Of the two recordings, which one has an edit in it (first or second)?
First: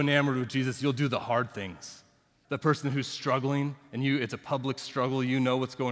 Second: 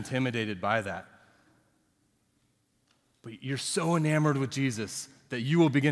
first